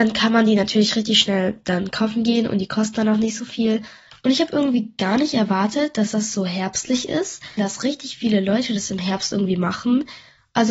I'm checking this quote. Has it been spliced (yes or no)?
yes